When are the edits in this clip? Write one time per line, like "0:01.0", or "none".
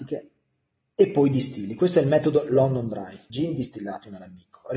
0:03.3